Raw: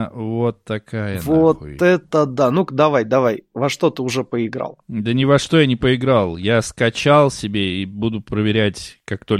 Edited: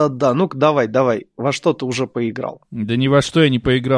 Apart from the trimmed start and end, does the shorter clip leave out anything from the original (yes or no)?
no